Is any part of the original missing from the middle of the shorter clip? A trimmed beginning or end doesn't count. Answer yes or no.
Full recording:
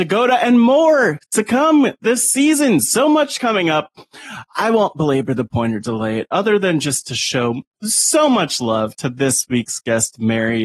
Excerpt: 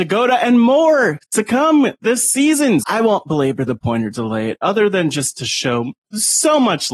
yes